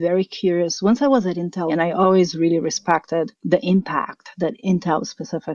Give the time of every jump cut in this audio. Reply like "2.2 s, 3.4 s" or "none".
1.7 s, 3.3 s